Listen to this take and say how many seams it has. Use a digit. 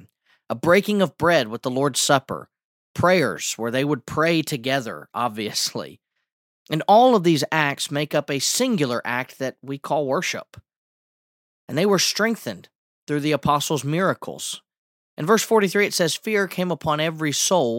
0